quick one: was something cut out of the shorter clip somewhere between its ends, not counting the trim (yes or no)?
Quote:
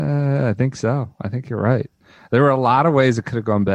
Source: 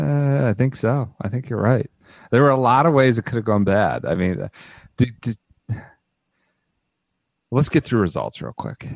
no